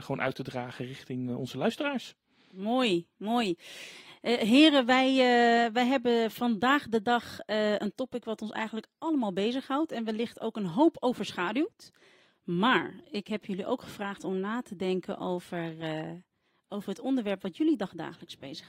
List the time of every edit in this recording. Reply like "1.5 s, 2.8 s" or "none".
none